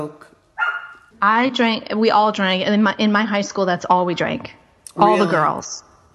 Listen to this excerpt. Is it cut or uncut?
cut